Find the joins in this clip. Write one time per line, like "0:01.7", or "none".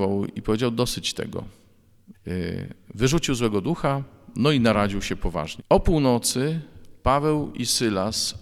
0:02.1
0:05.6